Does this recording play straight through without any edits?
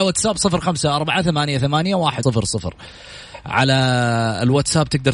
no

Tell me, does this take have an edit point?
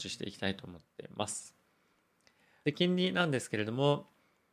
yes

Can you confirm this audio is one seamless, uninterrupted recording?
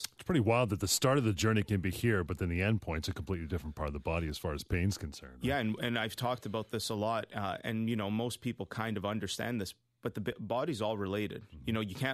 yes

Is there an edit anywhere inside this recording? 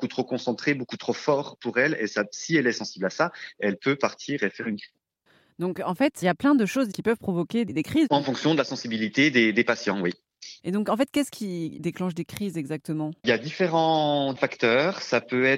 yes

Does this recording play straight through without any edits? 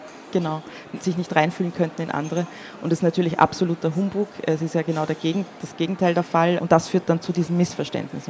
no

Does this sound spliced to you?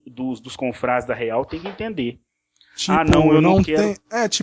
no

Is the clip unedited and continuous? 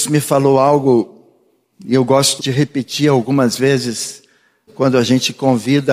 no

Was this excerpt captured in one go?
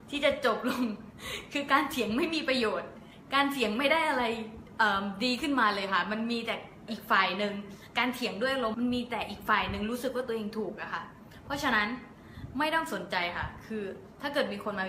no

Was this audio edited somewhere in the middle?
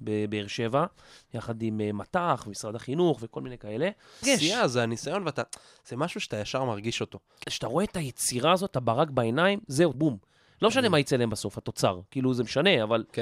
yes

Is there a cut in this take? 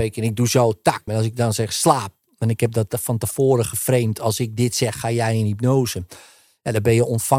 yes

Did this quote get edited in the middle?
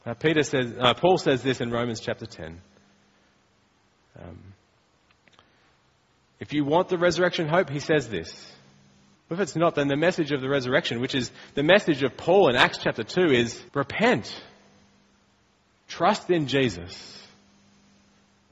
yes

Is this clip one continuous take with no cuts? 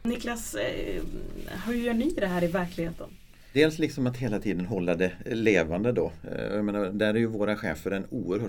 yes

